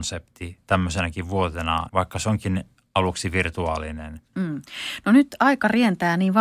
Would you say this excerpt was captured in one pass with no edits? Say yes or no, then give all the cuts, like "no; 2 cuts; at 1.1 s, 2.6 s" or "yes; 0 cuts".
no; 2 cuts; at 1.9 s, 4.3 s